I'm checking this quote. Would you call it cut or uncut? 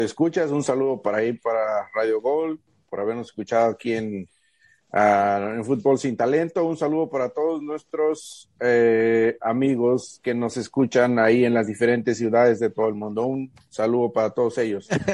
uncut